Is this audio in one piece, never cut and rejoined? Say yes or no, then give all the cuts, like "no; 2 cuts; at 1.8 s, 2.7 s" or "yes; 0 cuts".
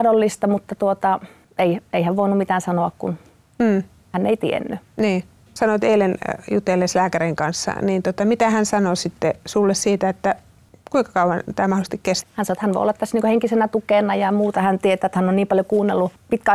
no; 1 cut; at 12.2 s